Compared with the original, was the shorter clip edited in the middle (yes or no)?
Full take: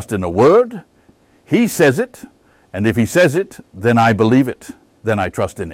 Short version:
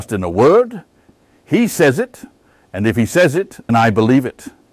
yes